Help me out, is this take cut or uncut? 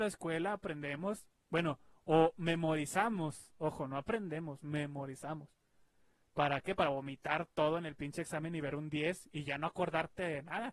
uncut